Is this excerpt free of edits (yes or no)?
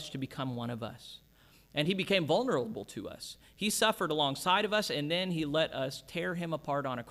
yes